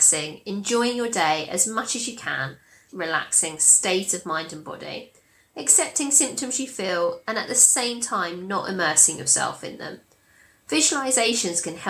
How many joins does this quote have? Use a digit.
1